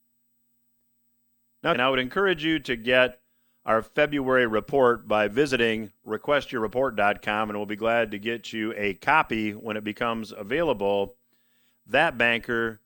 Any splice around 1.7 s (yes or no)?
yes